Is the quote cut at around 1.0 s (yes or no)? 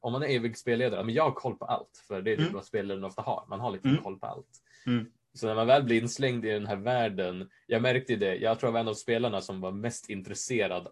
yes